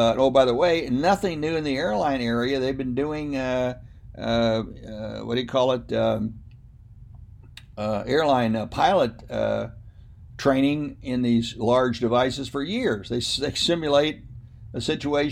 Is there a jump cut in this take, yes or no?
no